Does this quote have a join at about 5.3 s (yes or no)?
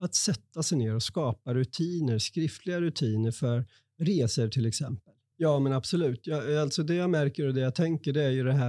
yes